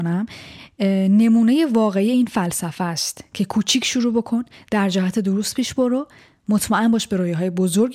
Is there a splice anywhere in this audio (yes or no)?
no